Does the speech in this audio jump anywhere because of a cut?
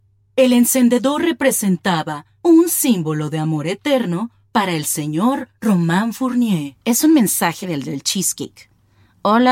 no; 0 cuts

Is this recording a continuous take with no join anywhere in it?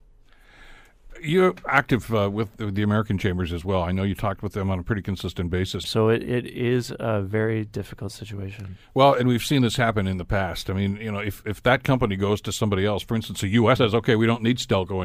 no; 2 cuts; at 5.8 s, 13.8 s

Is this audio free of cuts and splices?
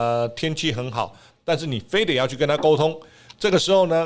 no; 1 cut; at 1.3 s

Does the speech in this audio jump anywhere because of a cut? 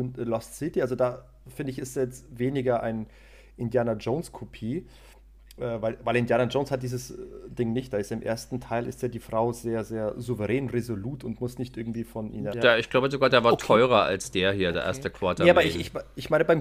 yes; 1 cut; at 12.5 s

